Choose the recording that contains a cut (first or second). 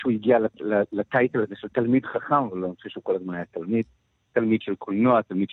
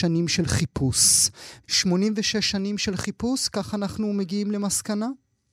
second